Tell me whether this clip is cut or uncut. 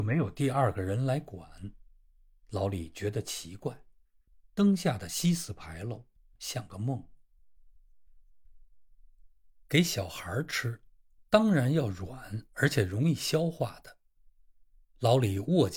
uncut